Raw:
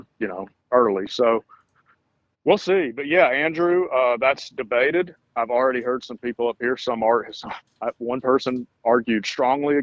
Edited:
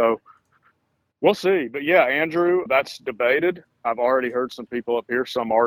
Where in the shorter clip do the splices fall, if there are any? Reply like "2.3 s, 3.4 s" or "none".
2.7 s